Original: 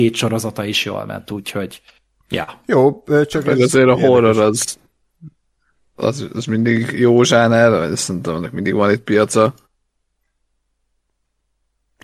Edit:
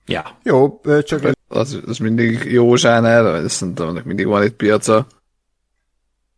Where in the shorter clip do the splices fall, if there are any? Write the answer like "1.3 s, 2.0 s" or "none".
1.3 s